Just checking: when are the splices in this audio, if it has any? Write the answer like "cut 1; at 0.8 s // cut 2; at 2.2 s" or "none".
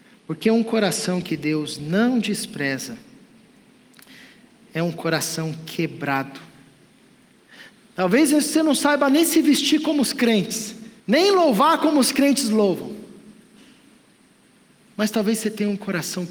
cut 1; at 7.8 s // cut 2; at 11.0 s